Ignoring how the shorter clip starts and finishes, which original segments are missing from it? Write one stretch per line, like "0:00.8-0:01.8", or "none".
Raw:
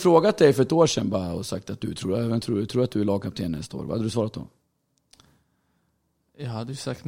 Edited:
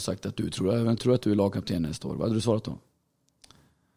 0:02.4-0:02.7